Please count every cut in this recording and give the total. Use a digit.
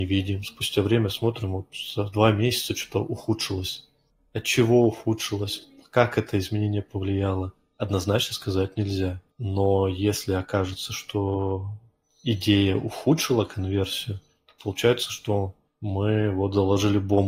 1